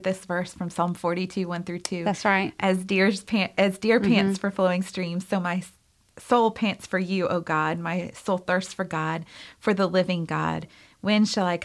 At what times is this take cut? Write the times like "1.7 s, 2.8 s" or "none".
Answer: none